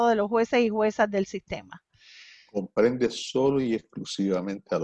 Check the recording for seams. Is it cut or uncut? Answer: uncut